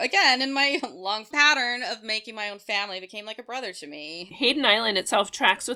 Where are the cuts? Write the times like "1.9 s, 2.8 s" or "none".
4.3 s